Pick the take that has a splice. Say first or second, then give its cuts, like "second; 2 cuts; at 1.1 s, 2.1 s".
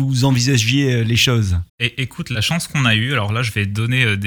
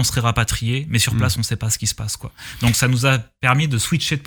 first; 1 cut; at 1.7 s